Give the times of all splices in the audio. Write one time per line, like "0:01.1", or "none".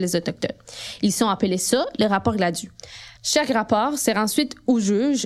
0:03.2